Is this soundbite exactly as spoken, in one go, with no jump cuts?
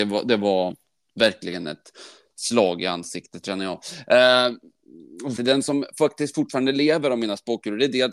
no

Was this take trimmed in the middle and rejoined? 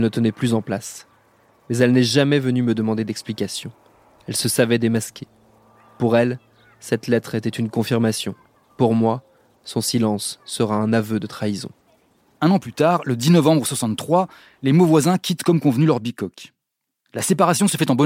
no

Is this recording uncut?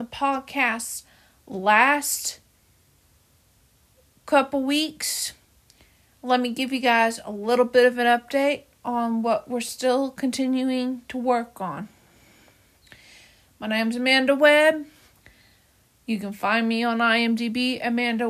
yes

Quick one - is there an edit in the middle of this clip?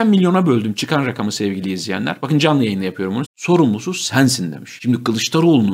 yes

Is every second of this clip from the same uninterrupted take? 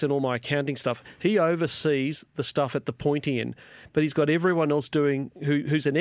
yes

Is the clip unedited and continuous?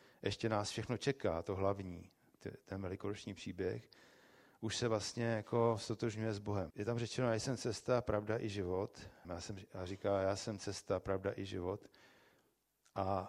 no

